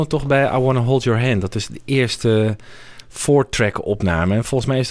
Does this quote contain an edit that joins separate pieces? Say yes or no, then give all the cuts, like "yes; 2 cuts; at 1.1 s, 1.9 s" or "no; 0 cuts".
no; 0 cuts